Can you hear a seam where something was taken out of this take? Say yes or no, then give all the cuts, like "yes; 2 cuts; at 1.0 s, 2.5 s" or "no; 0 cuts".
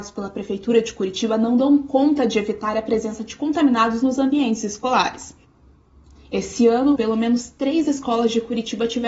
yes; 1 cut; at 7.0 s